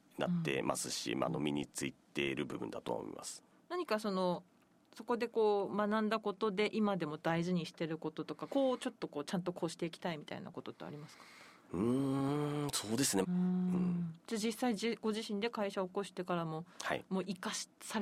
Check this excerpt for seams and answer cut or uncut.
cut